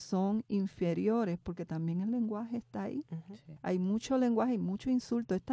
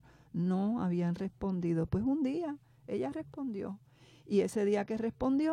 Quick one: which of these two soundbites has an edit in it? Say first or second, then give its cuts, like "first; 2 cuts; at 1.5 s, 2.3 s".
first; 1 cut; at 3.6 s